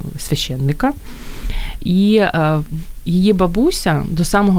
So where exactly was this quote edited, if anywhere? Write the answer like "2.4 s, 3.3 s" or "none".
1.8 s

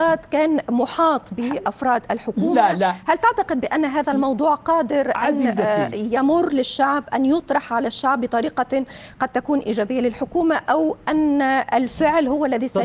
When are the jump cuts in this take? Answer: none

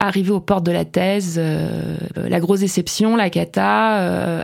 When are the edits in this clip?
2.1 s

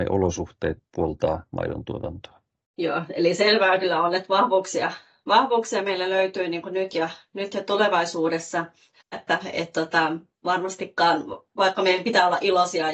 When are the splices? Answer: 9.1 s

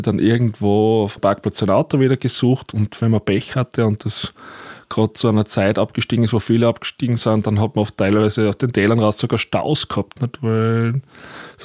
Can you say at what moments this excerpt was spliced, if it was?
1.2 s

